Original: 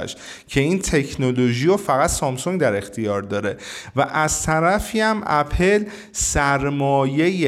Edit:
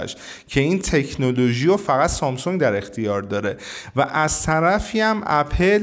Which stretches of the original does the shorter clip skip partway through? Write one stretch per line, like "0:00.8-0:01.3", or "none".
none